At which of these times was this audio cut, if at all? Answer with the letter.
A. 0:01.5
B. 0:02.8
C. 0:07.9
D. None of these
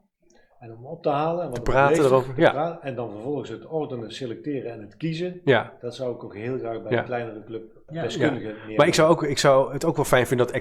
C